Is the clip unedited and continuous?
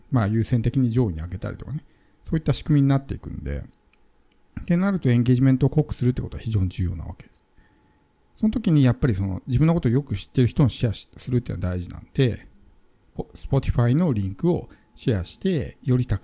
yes; 0 cuts

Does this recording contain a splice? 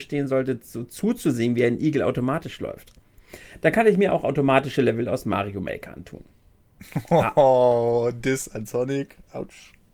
no; 0 cuts

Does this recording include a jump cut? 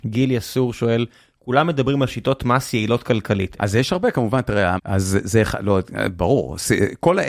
yes; 2 cuts; at 3.6 s, 4.8 s

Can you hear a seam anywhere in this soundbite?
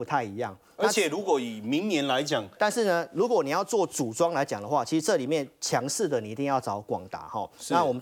yes; 1 cut; at 2.6 s

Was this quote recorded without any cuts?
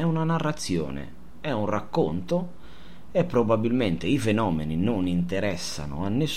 yes; 0 cuts

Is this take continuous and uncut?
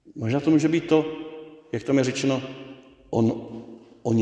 yes; 0 cuts

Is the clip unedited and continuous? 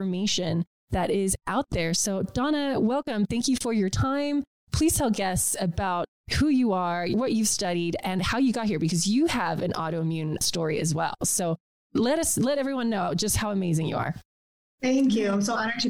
yes; 0 cuts

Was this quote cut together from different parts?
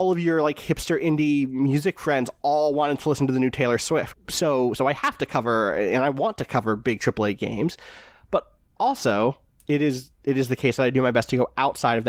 yes; 1 cut; at 4.1 s

